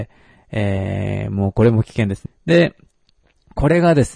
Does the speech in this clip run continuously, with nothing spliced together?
no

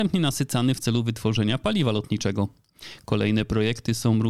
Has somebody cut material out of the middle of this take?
no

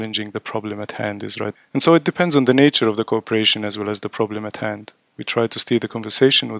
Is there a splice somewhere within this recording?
yes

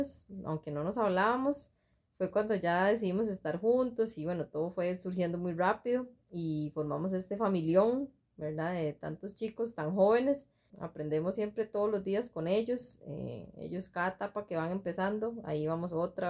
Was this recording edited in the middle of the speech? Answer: yes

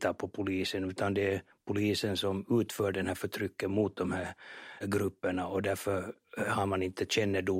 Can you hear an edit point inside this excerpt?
yes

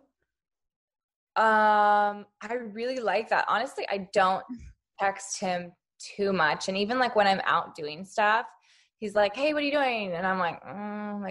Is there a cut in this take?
no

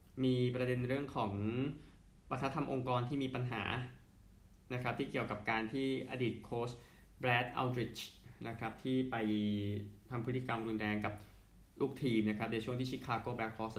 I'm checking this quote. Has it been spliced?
yes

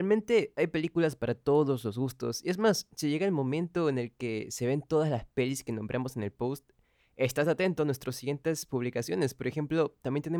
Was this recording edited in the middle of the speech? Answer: no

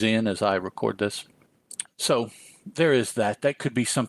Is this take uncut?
no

